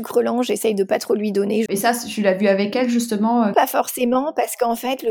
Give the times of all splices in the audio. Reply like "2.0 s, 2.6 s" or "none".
1.7 s, 3.5 s